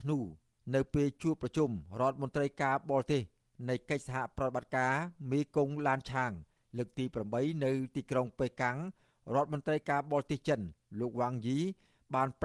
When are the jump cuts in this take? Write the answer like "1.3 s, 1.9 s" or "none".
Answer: none